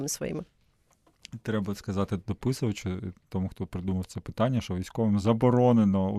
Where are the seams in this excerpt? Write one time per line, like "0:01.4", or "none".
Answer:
none